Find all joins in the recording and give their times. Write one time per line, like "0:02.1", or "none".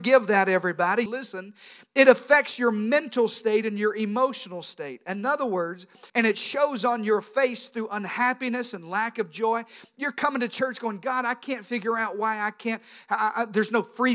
0:01.1
0:06.1